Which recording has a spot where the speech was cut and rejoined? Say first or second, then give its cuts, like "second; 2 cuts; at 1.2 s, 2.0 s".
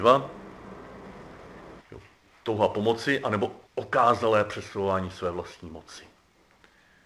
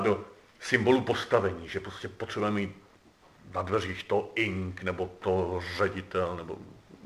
first; 2 cuts; at 1.8 s, 3.7 s